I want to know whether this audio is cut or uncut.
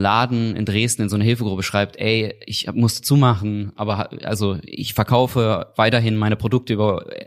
cut